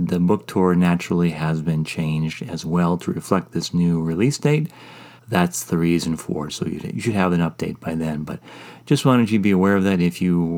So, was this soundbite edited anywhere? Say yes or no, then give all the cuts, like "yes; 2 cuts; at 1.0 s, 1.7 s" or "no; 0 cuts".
yes; 2 cuts; at 5.2 s, 6.5 s